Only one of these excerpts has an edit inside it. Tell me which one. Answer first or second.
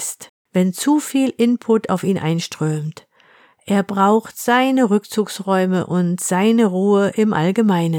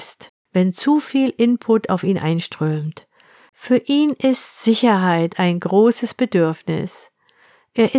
second